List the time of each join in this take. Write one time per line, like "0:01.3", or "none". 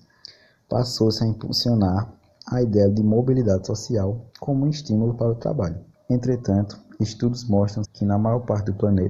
0:06.0
0:07.8